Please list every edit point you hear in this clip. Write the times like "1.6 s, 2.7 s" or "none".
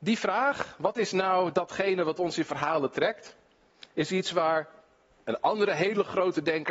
none